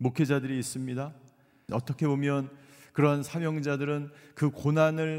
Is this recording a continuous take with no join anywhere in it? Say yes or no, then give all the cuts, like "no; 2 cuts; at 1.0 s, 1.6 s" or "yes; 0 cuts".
no; 1 cut; at 1.7 s